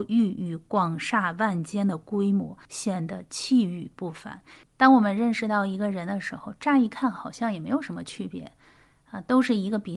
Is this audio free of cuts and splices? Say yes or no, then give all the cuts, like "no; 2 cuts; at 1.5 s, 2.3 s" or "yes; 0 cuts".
no; 2 cuts; at 2.6 s, 4.6 s